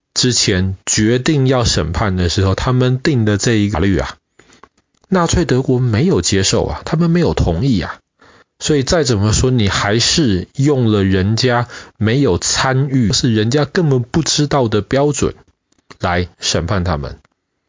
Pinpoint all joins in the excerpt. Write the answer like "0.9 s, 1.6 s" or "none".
none